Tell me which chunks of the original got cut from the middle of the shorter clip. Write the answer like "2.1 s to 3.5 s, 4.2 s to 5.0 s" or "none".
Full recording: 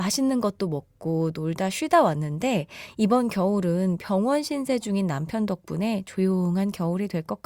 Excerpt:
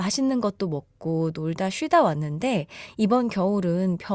none